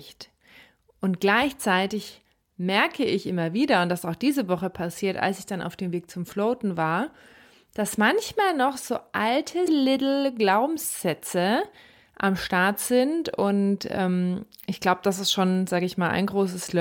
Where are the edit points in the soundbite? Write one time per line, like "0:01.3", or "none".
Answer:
0:09.7